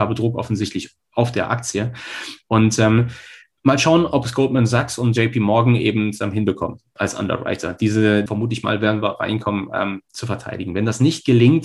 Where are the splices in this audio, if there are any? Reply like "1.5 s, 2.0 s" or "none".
8.3 s